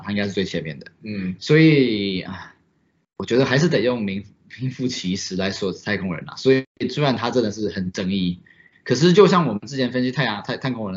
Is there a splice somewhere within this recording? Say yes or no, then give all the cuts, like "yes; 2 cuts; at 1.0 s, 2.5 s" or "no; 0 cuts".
no; 0 cuts